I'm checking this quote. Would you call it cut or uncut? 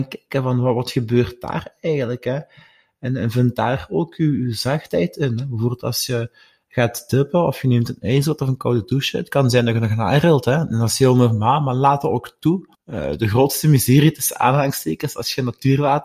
cut